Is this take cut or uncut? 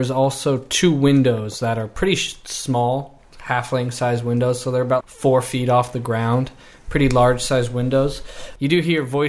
cut